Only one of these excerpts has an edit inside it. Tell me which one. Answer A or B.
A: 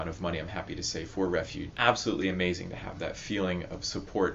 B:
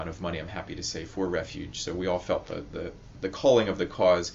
A